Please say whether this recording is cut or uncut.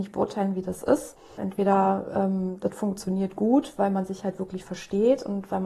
cut